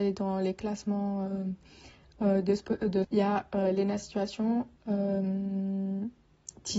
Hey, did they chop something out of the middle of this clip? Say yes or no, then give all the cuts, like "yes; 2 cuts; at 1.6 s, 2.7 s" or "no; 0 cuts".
yes; 2 cuts; at 3.0 s, 4.8 s